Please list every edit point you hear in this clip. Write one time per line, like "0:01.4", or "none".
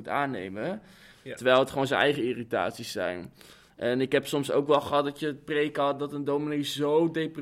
0:01.1